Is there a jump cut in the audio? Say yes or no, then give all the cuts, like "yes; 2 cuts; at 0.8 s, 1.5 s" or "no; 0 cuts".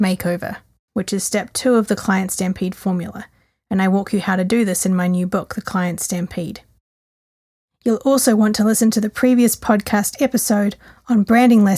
no; 0 cuts